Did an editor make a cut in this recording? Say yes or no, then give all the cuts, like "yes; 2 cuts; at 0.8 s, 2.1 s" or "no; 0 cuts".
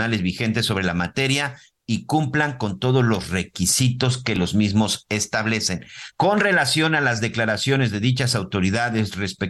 yes; 1 cut; at 6.1 s